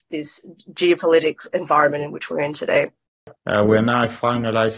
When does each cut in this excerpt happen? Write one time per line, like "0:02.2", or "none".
0:03.4